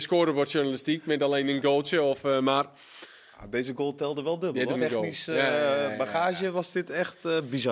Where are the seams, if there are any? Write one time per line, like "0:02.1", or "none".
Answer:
0:04.7